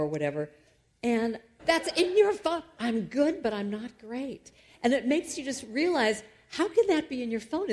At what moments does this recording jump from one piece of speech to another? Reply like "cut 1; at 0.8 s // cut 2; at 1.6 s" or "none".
cut 1; at 1.6 s